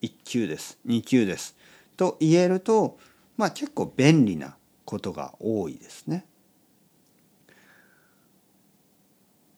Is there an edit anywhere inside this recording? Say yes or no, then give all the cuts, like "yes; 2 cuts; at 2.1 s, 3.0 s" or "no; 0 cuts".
no; 0 cuts